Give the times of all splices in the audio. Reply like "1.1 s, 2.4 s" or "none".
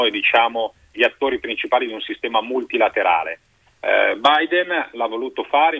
3.7 s